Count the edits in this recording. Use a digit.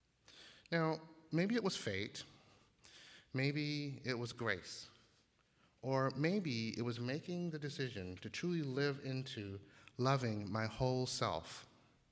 0